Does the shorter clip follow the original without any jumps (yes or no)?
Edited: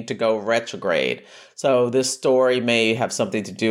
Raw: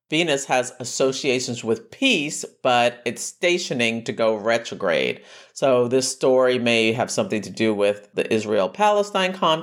yes